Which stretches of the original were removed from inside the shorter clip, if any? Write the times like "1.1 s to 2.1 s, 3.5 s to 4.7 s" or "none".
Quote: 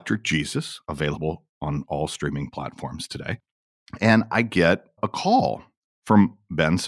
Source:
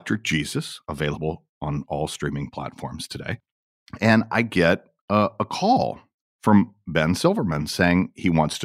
5.0 s to 5.3 s